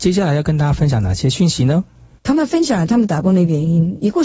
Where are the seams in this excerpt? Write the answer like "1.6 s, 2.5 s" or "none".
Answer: 2.2 s

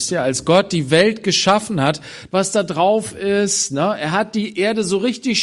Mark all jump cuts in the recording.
2.3 s

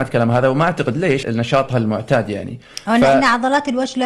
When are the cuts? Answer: 1.2 s

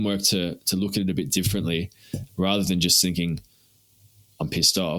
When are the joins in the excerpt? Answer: 2.3 s

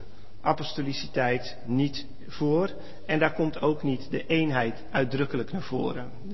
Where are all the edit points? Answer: none

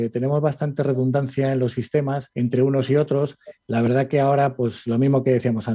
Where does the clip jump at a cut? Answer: 2.3 s

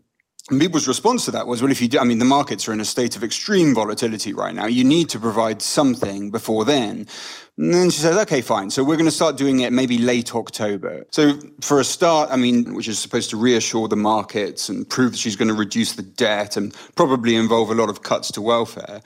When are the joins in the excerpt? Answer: 11.1 s, 12.7 s

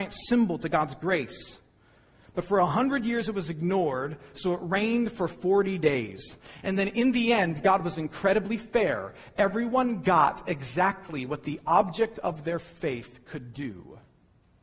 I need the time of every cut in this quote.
none

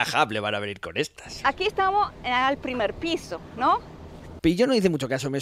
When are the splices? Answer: 4.4 s

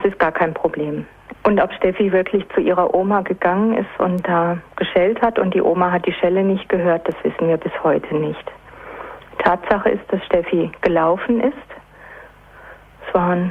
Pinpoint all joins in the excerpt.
1.3 s

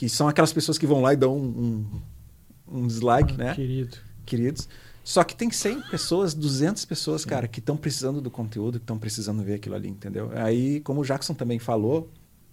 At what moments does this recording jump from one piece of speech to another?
3.3 s

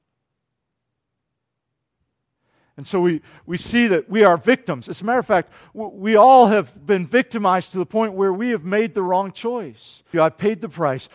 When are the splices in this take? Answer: 10.1 s

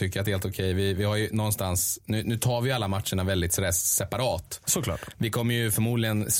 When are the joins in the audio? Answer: none

